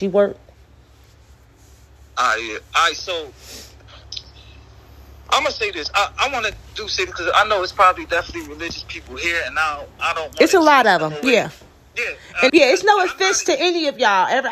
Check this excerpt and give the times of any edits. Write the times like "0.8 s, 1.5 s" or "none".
12.5 s